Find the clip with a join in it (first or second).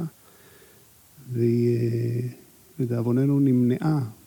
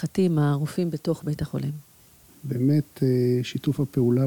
second